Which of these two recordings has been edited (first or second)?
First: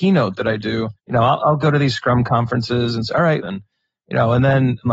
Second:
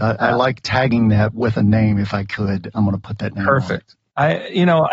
first